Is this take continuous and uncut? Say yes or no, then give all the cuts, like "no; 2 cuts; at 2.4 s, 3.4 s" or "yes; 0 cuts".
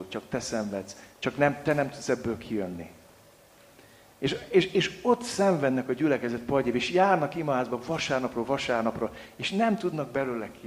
yes; 0 cuts